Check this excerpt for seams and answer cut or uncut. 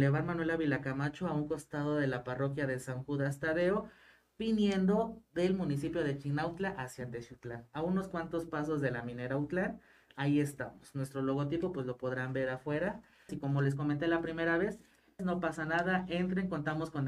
cut